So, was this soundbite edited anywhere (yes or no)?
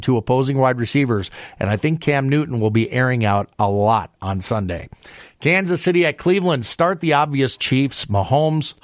no